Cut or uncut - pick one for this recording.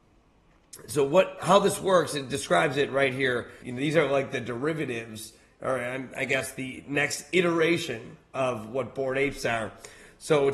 cut